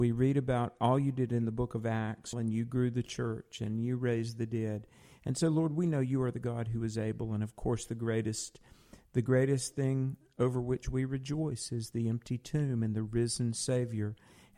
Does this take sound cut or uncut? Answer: cut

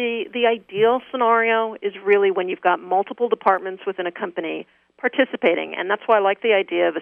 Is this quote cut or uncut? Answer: uncut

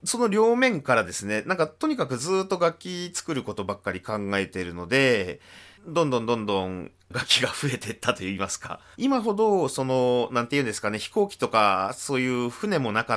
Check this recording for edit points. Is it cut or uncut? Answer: cut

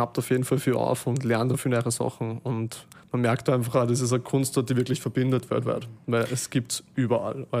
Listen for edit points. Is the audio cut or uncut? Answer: uncut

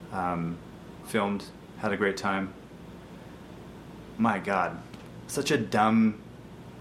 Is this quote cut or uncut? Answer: cut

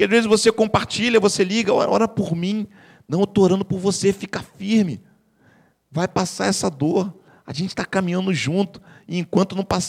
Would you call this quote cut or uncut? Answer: uncut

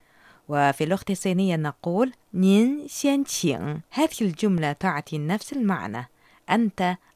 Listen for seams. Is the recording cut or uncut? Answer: cut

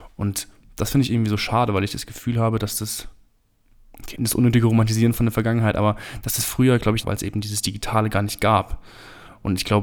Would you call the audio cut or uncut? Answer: cut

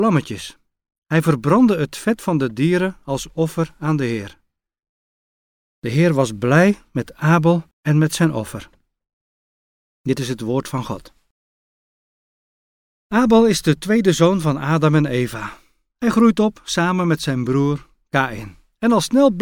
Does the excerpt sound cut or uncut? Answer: cut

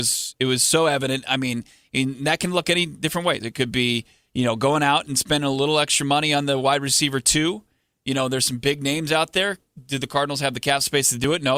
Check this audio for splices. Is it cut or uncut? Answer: uncut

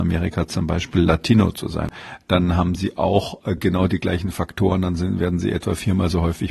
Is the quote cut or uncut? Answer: uncut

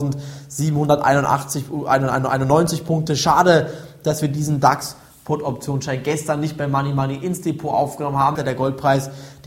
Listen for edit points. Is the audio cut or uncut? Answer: cut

